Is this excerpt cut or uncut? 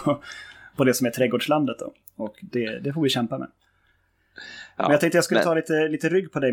uncut